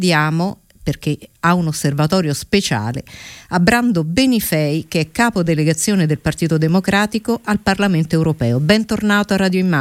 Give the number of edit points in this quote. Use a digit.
0